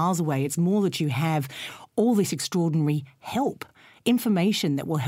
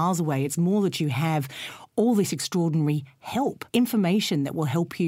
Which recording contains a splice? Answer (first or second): second